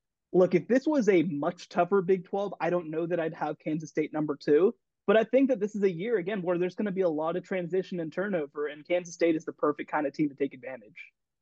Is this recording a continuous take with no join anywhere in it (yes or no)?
yes